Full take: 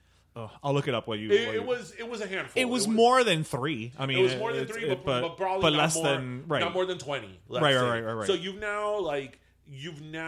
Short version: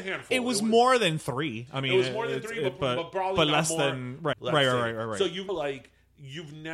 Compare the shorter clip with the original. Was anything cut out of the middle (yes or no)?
yes